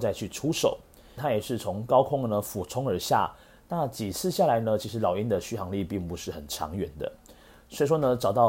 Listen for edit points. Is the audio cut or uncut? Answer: cut